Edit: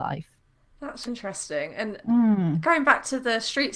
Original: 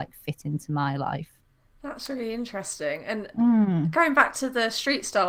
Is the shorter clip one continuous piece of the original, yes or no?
no